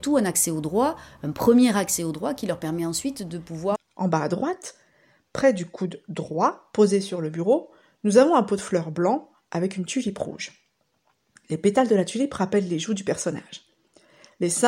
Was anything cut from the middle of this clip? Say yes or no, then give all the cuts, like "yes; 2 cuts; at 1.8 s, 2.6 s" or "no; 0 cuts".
yes; 1 cut; at 3.8 s